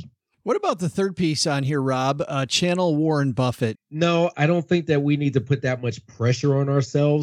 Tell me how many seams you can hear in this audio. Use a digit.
1